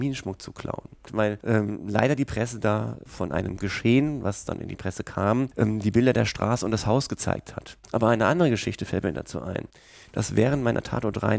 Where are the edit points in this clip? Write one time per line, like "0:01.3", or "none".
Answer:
0:01.1
0:07.8